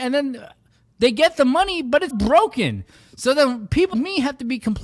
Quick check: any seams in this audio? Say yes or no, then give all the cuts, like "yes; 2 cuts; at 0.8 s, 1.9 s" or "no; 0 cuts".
yes; 2 cuts; at 2.1 s, 3.9 s